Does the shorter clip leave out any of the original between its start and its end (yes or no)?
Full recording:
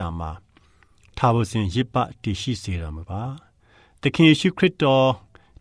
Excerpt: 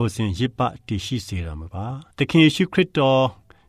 yes